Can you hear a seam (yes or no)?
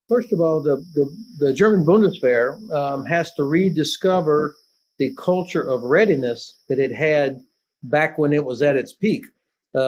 no